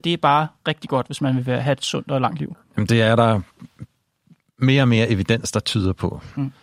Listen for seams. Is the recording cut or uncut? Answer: uncut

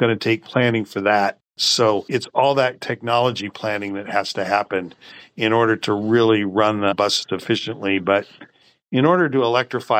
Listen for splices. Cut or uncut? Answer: uncut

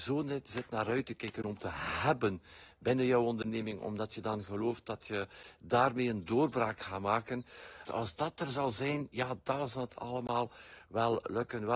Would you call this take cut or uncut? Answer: cut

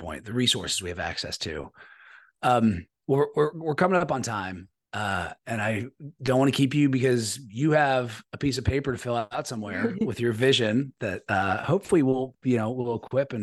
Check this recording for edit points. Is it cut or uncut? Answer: uncut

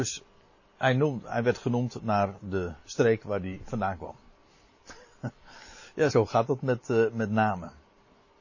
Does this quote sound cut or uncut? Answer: uncut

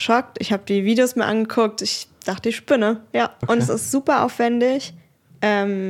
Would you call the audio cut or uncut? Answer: cut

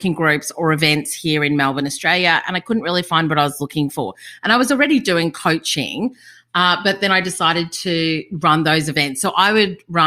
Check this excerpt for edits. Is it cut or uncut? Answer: uncut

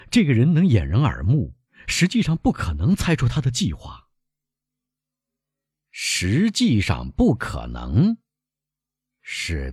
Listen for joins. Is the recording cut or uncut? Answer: uncut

